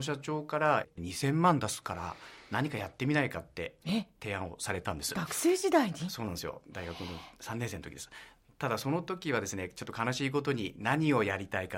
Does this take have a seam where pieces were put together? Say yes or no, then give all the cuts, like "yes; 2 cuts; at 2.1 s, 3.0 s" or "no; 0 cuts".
no; 0 cuts